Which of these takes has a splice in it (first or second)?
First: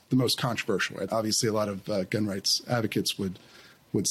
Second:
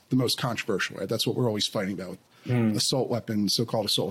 first